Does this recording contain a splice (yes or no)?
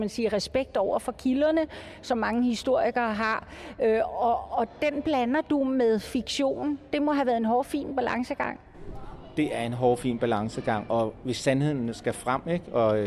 no